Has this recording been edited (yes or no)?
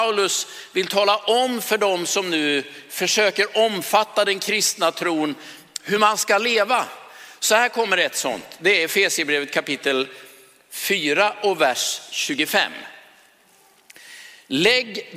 no